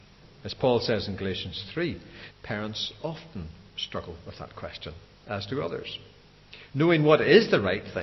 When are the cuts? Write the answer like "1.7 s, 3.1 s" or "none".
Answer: 2.3 s, 6.7 s